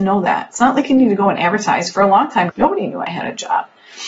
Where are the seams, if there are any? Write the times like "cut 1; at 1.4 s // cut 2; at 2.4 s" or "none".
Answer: cut 1; at 2.5 s